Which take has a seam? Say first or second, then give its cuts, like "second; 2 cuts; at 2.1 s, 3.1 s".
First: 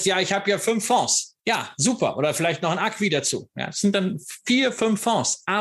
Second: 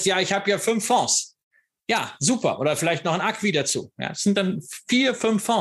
first; 1 cut; at 1.4 s